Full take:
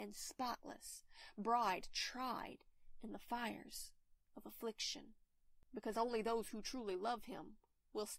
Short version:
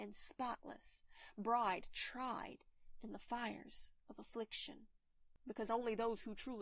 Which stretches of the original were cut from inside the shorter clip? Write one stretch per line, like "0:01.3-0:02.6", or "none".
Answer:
0:04.0-0:04.3